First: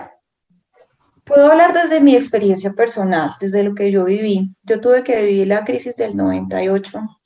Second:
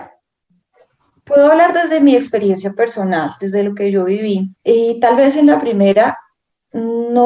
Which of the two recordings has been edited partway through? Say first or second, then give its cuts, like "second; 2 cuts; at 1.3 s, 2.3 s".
second; 1 cut; at 4.6 s